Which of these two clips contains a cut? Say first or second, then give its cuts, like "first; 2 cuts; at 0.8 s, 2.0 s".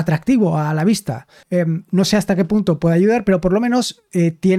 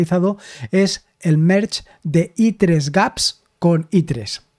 first; 1 cut; at 1.4 s